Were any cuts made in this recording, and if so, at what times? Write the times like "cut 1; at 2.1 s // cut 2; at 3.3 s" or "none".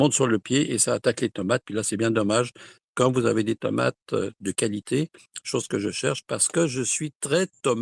none